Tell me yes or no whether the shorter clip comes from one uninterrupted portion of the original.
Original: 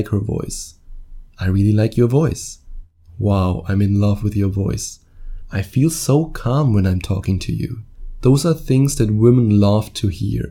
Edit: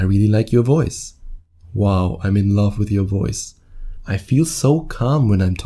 yes